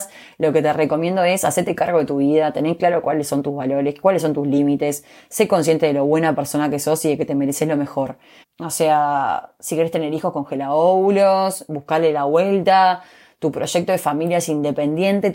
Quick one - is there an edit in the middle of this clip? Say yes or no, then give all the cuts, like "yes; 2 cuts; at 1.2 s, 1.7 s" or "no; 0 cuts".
yes; 1 cut; at 8.4 s